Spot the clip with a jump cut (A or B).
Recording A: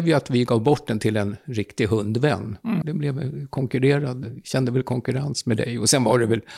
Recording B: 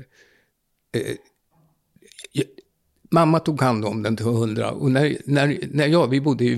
A